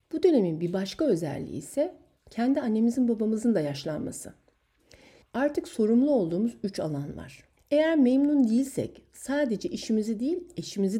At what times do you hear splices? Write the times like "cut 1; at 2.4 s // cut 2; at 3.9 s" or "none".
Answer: cut 1; at 5.2 s // cut 2; at 7.6 s